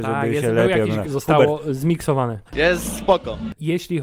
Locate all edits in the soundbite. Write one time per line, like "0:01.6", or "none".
0:01.0
0:02.4